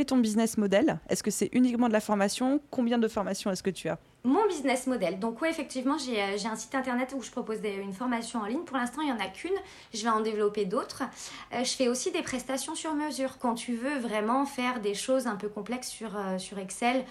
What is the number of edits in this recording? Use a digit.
0